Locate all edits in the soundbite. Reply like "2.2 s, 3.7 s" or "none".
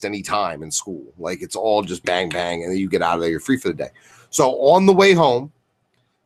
2.0 s